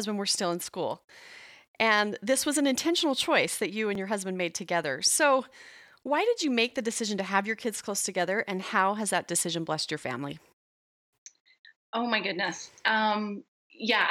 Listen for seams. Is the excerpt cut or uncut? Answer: uncut